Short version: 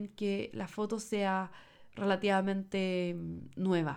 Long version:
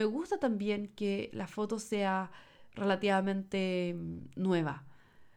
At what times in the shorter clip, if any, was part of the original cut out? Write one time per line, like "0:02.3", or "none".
none